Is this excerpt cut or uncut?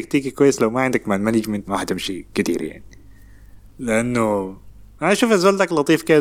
cut